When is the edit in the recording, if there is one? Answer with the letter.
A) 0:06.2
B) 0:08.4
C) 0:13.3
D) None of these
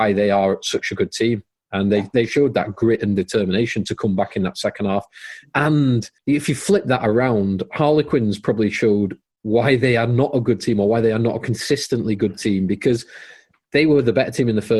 A